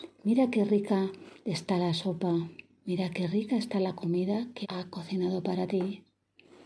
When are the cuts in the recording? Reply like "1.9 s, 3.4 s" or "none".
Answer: 4.6 s